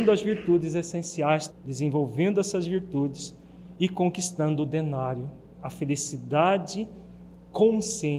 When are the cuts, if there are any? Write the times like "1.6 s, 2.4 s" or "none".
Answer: 1.5 s

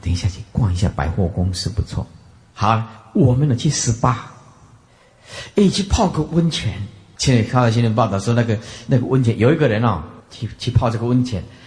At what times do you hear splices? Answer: 7.2 s, 10.2 s

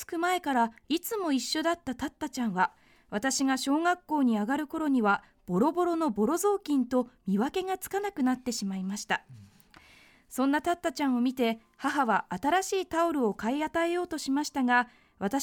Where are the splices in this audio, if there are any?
none

